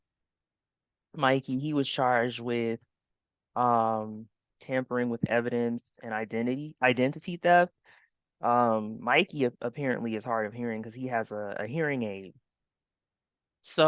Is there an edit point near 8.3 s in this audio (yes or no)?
yes